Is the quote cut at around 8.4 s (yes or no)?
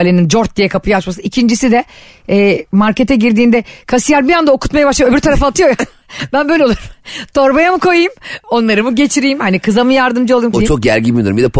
yes